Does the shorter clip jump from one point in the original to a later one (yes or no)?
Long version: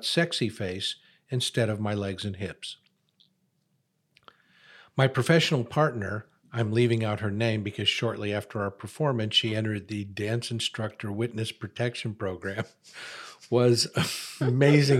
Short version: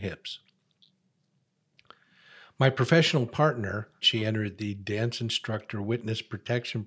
yes